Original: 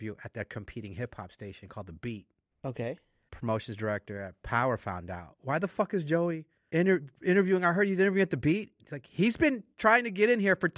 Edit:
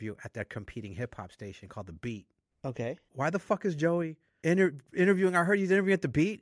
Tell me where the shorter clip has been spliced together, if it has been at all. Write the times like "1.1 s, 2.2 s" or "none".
3.1 s